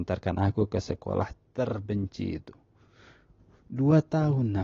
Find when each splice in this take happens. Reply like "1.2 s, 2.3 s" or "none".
none